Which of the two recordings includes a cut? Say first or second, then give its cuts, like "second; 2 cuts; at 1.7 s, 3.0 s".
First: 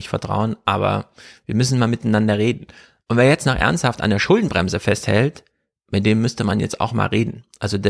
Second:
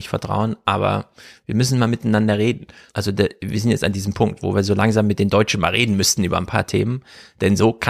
second; 1 cut; at 2.9 s